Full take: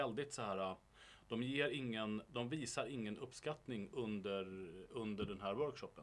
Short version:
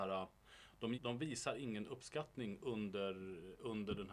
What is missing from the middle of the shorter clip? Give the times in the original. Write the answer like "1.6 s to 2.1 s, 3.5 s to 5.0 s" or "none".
1.4 s to 2.3 s